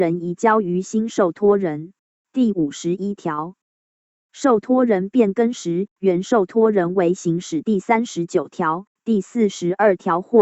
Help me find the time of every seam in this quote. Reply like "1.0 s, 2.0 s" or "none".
2.2 s